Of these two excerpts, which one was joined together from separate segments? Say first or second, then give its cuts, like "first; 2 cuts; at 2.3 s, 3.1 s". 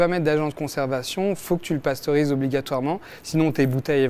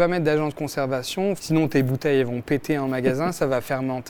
second; 1 cut; at 1.4 s